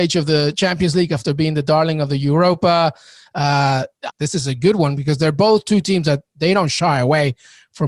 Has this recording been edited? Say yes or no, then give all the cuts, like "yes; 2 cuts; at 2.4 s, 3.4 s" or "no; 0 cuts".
yes; 1 cut; at 4.1 s